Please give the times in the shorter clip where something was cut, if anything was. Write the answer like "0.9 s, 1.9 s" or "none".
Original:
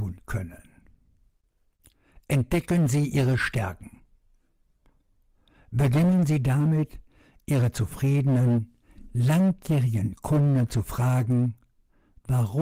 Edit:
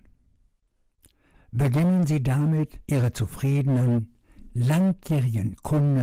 1.3 s, 2.8 s